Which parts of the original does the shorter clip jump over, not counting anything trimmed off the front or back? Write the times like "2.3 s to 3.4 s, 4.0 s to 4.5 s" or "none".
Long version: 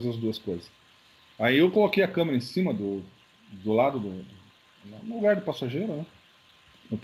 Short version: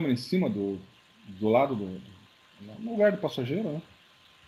none